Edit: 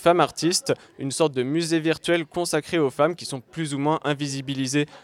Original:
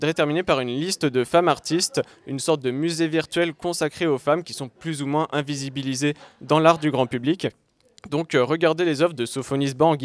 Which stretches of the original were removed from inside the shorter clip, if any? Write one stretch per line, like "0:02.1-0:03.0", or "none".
none